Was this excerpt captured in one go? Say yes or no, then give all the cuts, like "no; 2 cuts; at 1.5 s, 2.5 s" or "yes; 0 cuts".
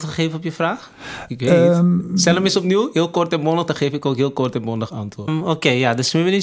no; 1 cut; at 5.3 s